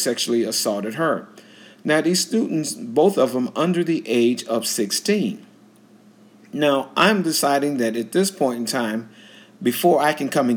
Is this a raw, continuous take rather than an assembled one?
yes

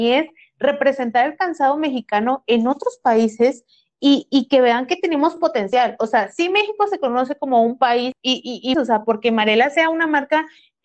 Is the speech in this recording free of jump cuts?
no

